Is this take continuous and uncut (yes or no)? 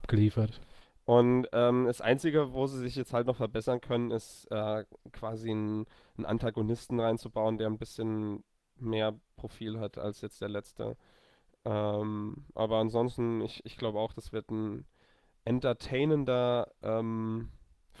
yes